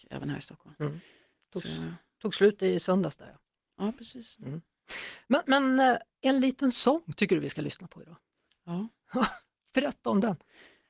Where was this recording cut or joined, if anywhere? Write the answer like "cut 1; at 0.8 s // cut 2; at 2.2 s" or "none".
none